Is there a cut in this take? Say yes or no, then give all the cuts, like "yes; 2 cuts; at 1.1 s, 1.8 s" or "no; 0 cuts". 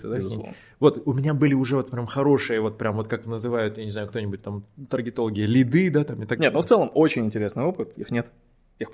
yes; 2 cuts; at 6.4 s, 7.9 s